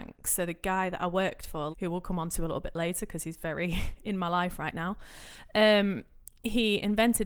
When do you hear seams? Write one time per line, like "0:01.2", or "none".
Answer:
0:01.7

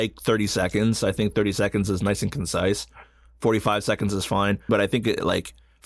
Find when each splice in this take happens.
0:04.7

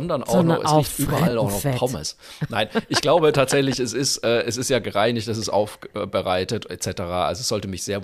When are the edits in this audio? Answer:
none

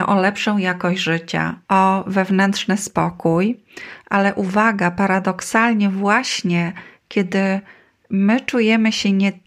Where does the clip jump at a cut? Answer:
0:01.7

